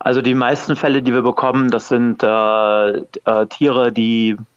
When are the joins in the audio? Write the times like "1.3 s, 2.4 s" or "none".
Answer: none